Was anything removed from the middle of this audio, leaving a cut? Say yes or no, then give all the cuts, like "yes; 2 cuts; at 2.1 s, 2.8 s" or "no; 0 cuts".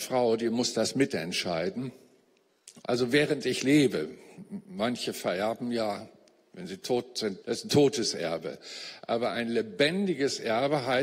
yes; 2 cuts; at 2.8 s, 7.4 s